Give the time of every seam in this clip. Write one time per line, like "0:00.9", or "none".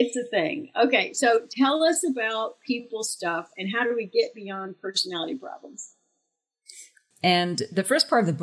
0:07.1